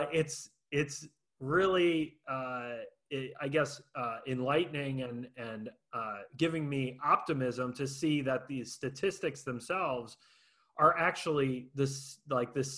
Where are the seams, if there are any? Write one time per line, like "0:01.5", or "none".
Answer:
none